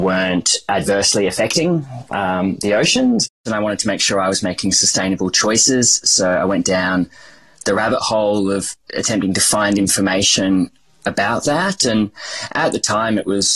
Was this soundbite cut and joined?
no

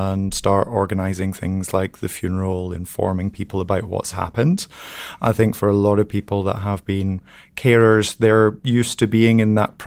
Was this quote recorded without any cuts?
yes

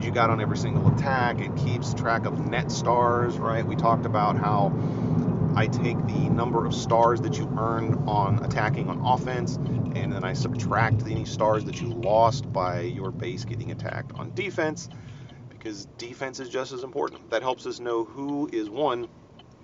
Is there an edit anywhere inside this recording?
no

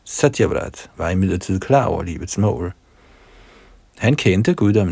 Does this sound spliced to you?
no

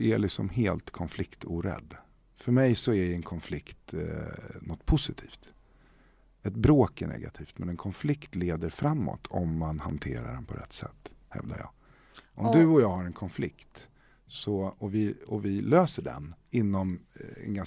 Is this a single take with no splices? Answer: no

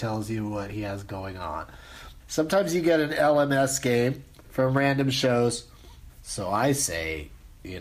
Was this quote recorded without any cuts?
no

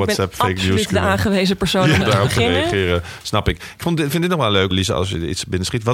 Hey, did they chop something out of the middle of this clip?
yes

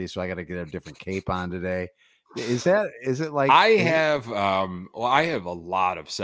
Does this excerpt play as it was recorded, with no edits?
yes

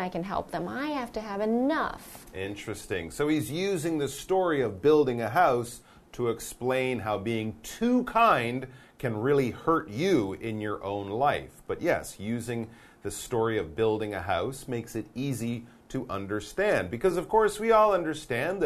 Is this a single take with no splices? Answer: yes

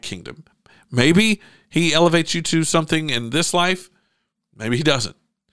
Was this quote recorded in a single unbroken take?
yes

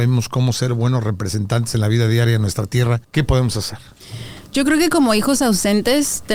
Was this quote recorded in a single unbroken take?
no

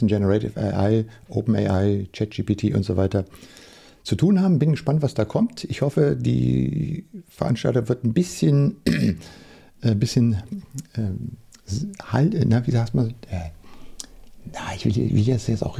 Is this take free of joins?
yes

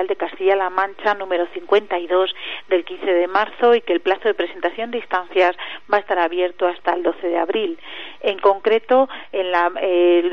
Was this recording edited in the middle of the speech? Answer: no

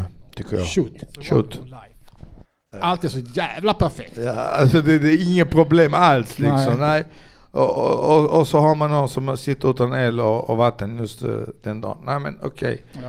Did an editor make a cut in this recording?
yes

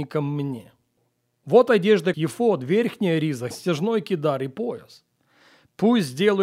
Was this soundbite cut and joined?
yes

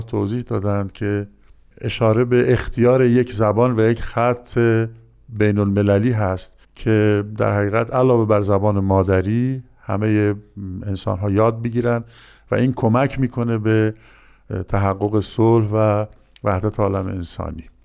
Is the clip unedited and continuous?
no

